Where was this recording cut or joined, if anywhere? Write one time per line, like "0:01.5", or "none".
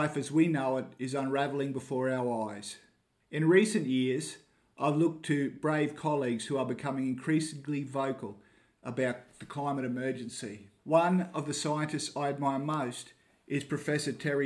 0:03.2
0:10.8